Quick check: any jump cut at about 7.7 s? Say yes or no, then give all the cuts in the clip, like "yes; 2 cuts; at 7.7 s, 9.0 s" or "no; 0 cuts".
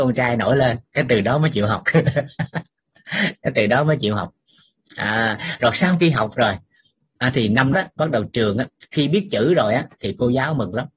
yes; 1 cut; at 7.7 s